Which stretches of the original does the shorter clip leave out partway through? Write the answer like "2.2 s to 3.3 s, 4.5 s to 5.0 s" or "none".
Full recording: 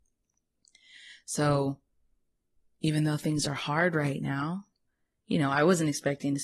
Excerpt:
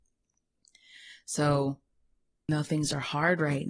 2.5 s to 3.0 s